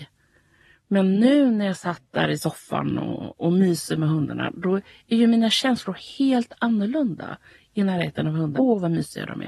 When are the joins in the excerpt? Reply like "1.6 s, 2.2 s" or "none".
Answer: 8.5 s